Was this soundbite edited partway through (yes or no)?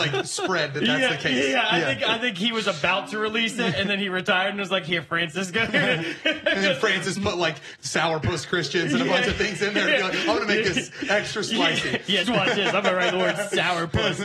yes